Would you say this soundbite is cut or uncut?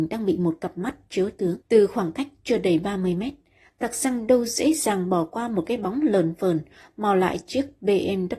cut